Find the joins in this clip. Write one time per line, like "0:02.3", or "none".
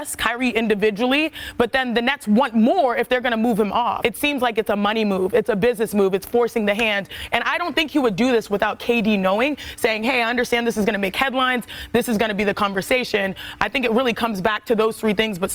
0:04.0